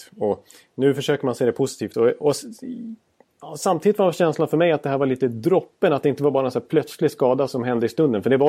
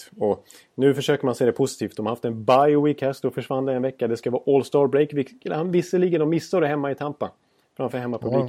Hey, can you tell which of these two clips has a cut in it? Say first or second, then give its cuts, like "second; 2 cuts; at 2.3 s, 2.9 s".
first; 1 cut; at 1.9 s